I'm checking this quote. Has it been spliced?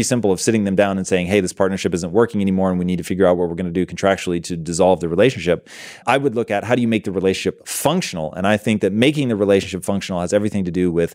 yes; 1 cut; at 6.0 s

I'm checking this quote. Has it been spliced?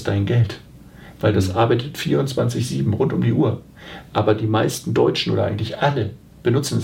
no; 0 cuts

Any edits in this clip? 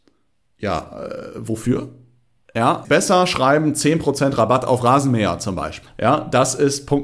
yes; 2 cuts; at 2.8 s, 5.8 s

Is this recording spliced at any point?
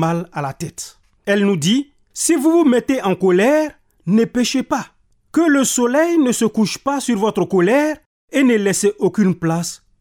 yes; 1 cut; at 1.2 s

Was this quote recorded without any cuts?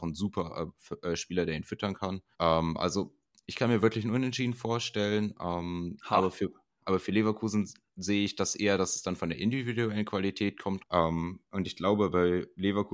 no; 2 cuts; at 2.3 s, 10.8 s

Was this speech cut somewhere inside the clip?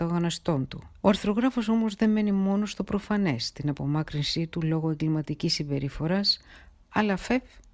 yes; 1 cut; at 1.0 s

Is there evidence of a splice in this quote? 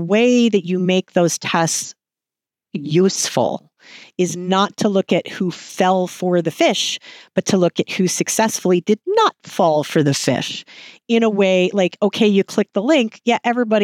no; 0 cuts

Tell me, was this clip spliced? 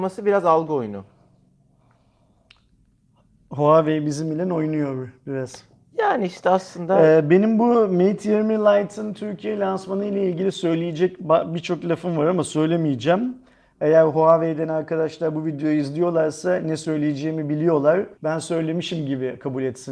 yes; 1 cut; at 18.1 s

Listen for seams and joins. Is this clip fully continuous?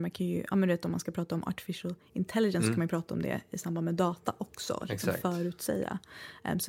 yes; 0 cuts

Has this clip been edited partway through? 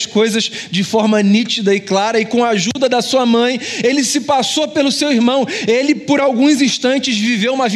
no; 0 cuts

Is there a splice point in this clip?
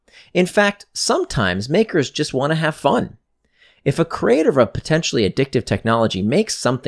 no; 0 cuts

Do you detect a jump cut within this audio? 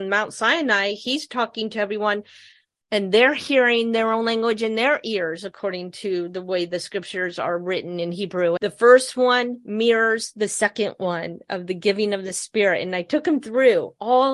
yes; 1 cut; at 8.6 s

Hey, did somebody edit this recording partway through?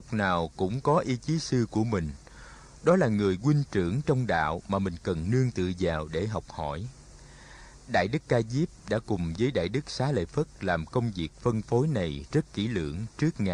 no; 0 cuts

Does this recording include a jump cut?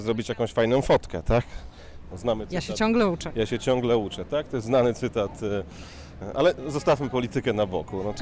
yes; 1 cut; at 2.1 s

